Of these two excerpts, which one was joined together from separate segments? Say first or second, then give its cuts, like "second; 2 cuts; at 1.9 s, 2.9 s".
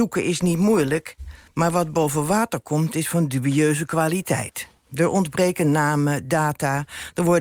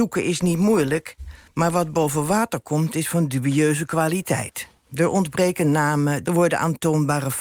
second; 1 cut; at 6.2 s